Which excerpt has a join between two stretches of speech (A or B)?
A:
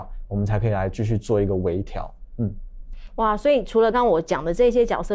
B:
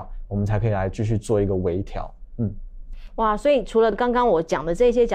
A